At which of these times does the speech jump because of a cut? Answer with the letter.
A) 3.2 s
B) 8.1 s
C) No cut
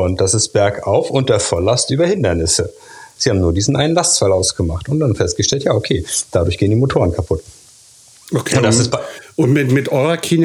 A